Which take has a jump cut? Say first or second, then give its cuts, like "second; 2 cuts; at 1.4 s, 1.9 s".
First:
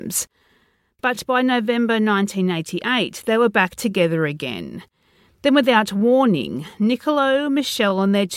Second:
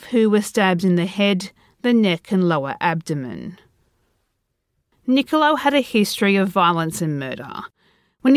second; 1 cut; at 4.9 s